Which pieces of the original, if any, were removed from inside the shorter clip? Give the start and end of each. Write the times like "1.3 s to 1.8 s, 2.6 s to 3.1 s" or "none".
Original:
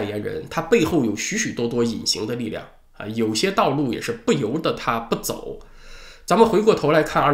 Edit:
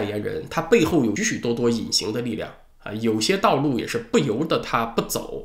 1.2 s to 1.3 s